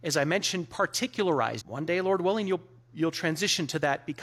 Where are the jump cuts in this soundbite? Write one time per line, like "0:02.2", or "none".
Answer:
0:01.6